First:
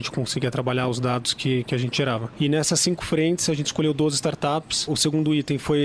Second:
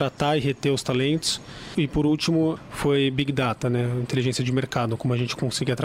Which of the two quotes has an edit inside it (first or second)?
first